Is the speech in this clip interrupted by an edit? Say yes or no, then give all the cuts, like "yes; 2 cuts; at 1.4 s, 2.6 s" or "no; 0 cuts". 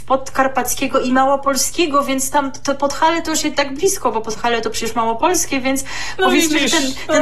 no; 0 cuts